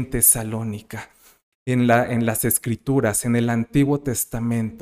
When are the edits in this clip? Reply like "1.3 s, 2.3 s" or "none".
1.5 s